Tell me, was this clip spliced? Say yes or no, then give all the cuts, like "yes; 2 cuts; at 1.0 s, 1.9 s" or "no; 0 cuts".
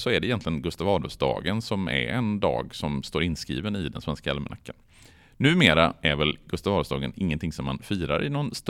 no; 0 cuts